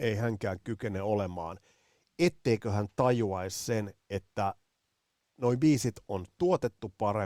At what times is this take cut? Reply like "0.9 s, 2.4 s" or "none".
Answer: none

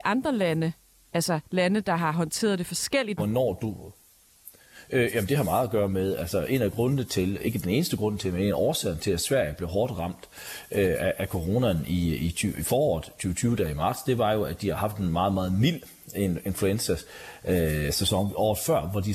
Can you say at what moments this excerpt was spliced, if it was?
3.2 s

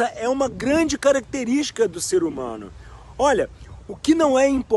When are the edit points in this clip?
none

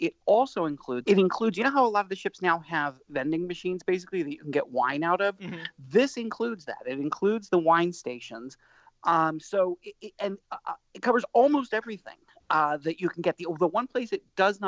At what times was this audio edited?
1.0 s, 10.4 s

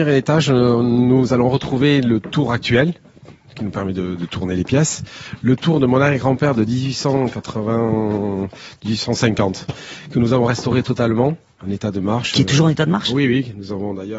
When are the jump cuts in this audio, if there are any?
none

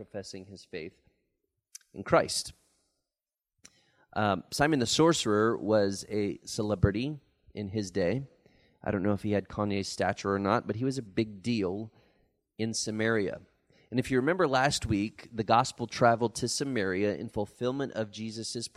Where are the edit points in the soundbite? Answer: 11.0 s

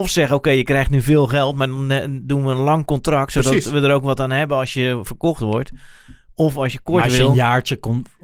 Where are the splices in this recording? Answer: none

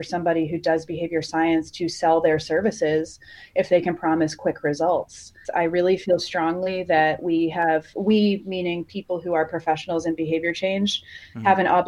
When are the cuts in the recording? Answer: 5.4 s

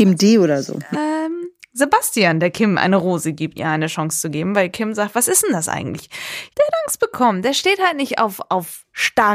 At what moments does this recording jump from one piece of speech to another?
0.9 s, 3.5 s, 6.5 s

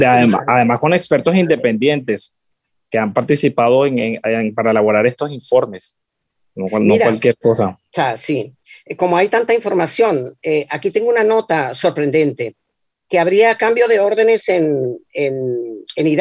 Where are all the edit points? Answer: 7.9 s

